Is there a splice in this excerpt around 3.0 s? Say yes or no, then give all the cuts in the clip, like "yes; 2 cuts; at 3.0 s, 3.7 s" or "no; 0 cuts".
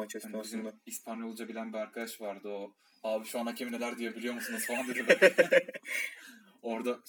no; 0 cuts